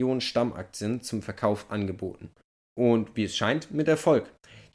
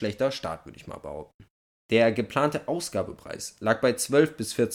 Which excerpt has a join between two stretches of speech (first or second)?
second